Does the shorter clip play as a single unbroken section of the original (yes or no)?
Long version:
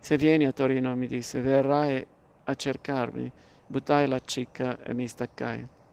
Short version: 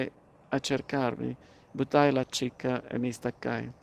yes